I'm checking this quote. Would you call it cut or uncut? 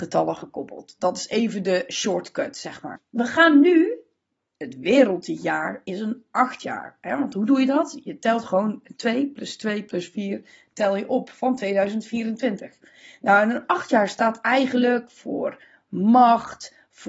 uncut